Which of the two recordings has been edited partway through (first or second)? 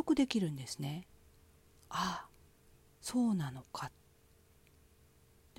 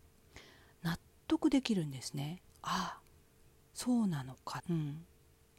second